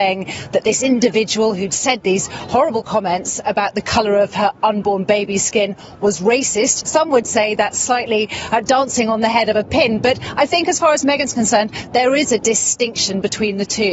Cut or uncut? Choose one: cut